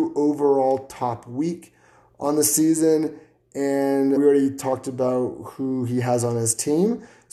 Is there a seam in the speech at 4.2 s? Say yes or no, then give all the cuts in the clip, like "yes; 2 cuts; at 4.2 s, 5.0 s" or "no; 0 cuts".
yes; 1 cut; at 4.2 s